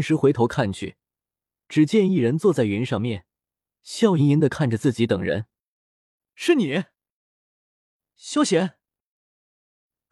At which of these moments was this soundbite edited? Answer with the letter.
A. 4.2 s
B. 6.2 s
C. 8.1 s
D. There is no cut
A